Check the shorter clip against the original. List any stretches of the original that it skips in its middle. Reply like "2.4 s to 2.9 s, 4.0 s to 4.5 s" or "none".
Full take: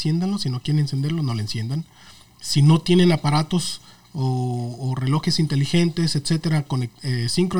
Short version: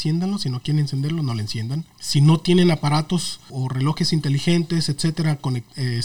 1.9 s to 2.3 s, 3.9 s to 4.8 s